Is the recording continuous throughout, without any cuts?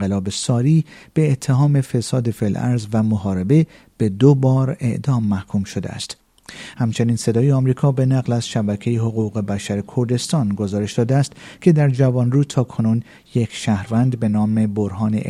no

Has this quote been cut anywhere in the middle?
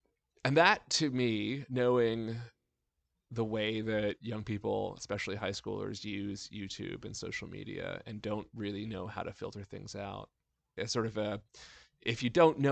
yes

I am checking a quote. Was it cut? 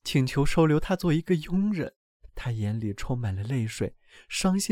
yes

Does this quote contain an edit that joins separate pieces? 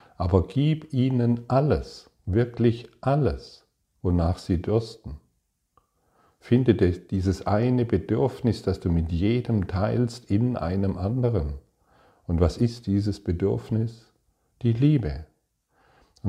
no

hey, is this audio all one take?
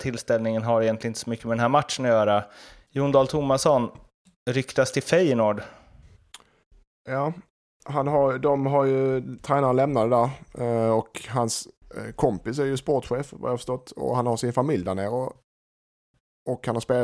yes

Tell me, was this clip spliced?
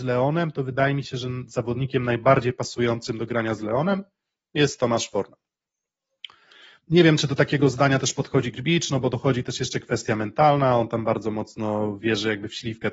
no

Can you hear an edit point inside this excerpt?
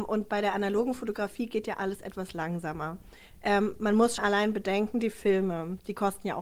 yes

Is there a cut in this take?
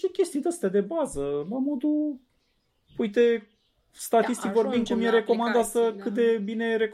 no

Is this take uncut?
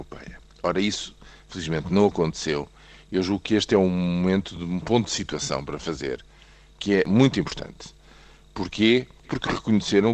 no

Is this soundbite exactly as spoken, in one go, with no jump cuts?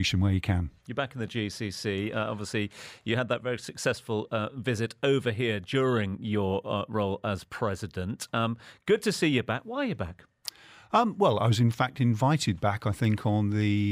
yes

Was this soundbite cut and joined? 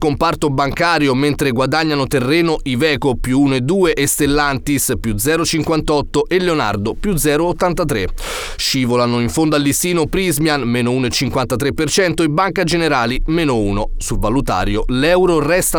no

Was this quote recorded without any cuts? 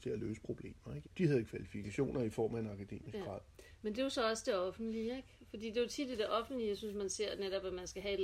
no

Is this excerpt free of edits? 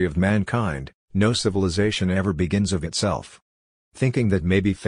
no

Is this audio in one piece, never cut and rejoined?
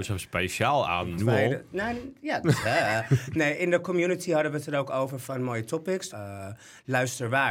no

